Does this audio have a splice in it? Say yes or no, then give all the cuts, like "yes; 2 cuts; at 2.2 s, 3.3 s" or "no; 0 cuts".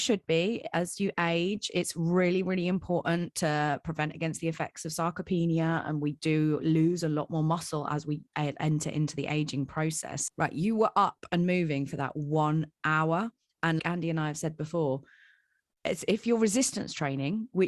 yes; 2 cuts; at 10.3 s, 13.8 s